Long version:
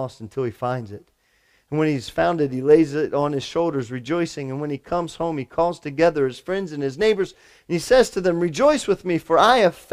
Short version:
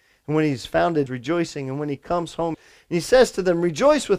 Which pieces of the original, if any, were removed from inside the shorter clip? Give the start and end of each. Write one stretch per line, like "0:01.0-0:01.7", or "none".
0:02.5-0:03.9
0:05.4-0:07.3